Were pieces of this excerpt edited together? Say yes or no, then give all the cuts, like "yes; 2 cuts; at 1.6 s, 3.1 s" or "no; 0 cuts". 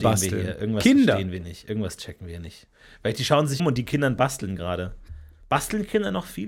yes; 1 cut; at 3.6 s